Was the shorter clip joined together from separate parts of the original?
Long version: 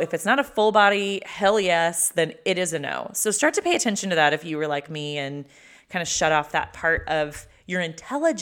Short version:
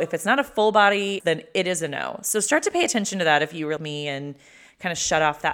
yes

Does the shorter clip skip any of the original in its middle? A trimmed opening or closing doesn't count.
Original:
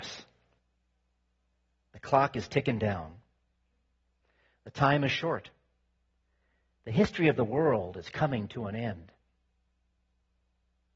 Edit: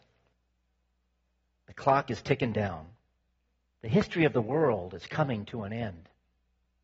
yes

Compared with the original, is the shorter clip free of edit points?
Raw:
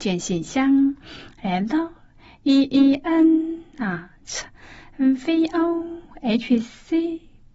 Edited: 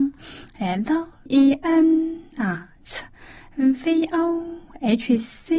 no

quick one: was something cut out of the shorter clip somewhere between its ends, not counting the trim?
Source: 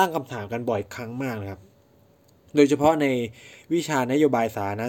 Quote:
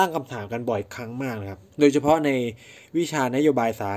yes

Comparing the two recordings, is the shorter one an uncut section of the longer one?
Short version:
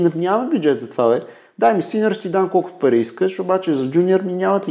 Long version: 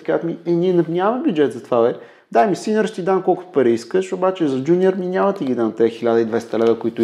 yes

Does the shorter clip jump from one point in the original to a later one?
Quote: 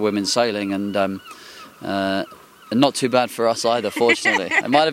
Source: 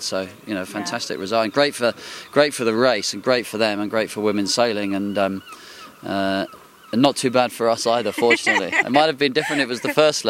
no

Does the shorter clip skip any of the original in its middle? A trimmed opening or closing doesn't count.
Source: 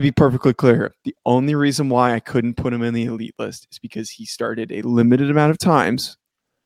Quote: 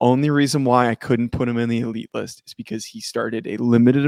no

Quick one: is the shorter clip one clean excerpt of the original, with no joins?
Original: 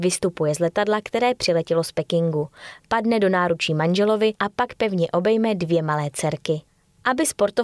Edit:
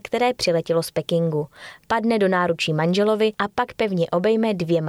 yes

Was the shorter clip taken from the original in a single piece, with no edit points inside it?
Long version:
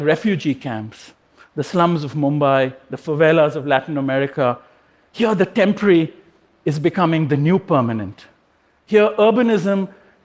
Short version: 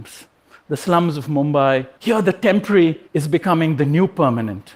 no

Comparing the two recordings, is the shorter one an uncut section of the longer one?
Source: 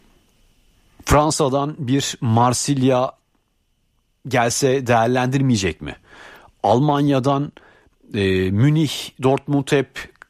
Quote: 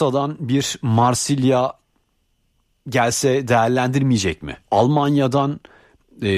no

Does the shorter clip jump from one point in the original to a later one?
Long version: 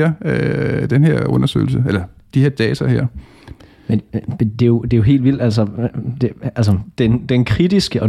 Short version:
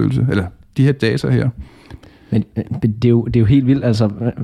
no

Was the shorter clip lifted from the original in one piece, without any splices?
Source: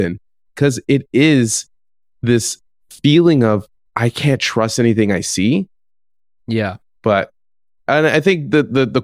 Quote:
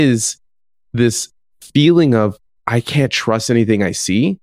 yes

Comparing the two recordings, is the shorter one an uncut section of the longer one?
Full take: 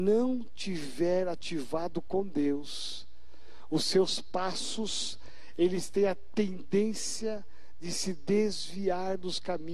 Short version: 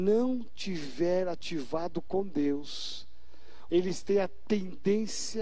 no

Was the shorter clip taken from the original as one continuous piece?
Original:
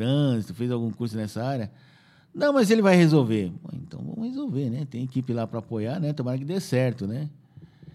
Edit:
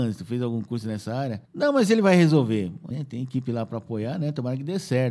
no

